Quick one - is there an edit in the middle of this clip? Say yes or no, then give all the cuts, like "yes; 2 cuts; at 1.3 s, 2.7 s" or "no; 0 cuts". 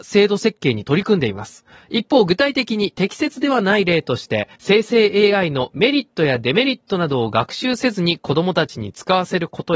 yes; 2 cuts; at 1.8 s, 4.5 s